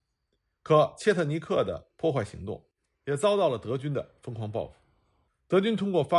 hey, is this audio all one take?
no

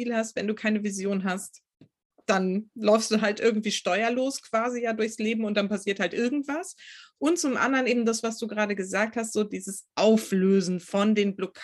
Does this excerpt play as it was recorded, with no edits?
yes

